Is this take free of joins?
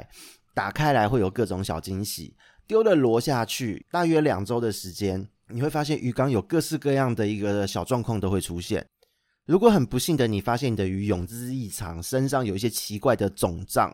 yes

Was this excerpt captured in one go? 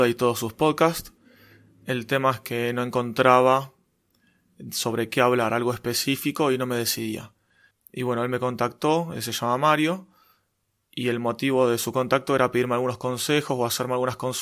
no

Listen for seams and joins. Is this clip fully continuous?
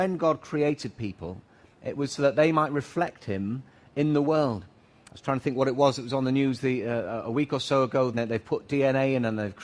no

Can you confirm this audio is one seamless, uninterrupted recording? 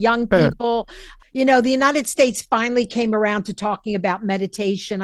no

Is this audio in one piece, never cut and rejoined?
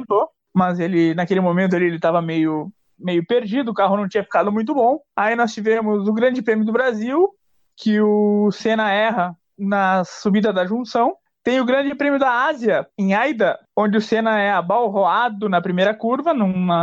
yes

